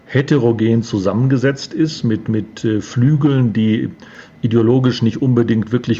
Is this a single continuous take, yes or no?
yes